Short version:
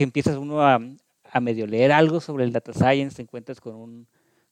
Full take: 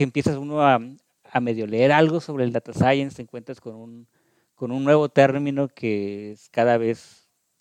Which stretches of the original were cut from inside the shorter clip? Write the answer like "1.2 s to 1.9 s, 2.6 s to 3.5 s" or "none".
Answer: none